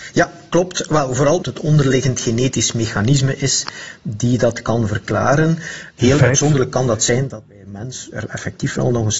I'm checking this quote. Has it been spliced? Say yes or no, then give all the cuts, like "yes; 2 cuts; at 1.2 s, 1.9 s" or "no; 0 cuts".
yes; 2 cuts; at 1.4 s, 6.0 s